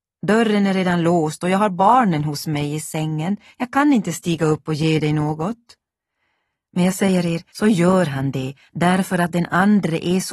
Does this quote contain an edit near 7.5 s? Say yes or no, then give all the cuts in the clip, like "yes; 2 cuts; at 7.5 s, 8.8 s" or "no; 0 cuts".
yes; 1 cut; at 7.5 s